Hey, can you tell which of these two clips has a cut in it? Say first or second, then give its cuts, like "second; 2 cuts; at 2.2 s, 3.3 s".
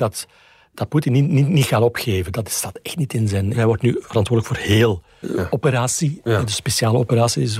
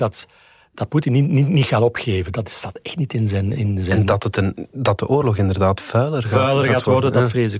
first; 2 cuts; at 3.5 s, 5.2 s